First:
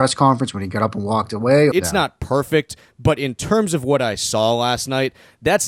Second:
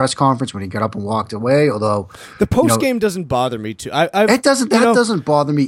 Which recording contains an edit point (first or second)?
first